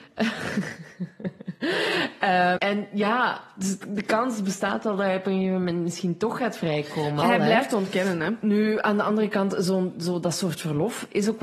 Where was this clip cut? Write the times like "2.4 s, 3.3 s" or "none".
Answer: 2.6 s, 7.2 s